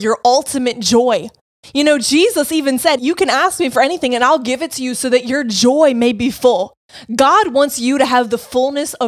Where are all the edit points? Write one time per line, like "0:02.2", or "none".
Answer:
0:03.0